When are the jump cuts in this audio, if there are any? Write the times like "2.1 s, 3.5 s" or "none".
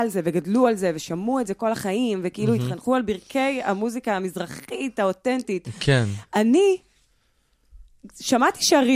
none